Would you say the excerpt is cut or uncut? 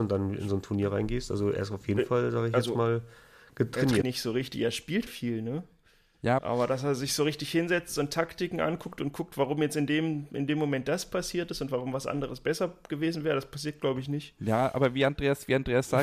cut